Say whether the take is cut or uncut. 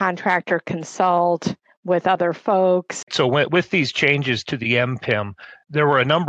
cut